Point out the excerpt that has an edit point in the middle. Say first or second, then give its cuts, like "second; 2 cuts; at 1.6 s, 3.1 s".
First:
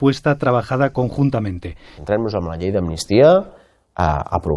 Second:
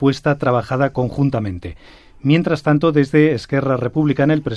first; 1 cut; at 2.0 s